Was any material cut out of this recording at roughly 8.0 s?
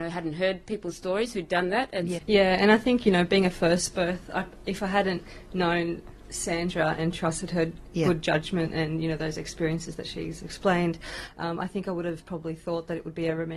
no; 1 cut; at 2.2 s

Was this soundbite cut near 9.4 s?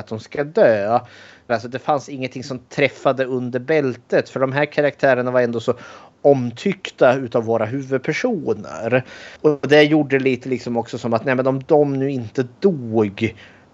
yes; 2 cuts; at 1.5 s, 9.4 s

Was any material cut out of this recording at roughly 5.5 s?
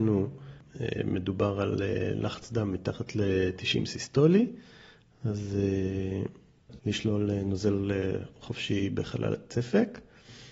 no; 1 cut; at 6.8 s

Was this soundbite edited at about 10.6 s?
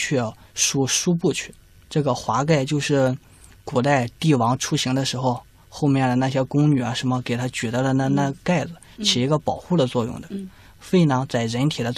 no; 1 cut; at 1.9 s

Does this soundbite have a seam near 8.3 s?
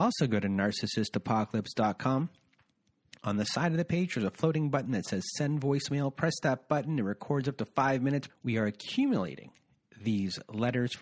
yes; 1 cut; at 8.3 s

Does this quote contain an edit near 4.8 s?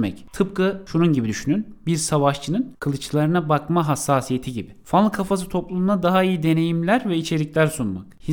no; 0 cuts

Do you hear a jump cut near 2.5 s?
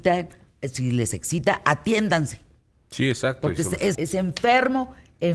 no; 1 cut; at 3.9 s

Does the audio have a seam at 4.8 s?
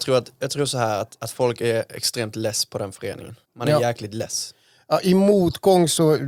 no; 1 cut; at 3.4 s

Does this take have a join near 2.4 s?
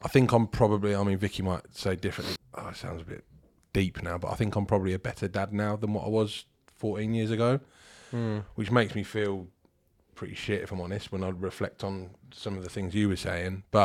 yes; 1 cut; at 2.4 s

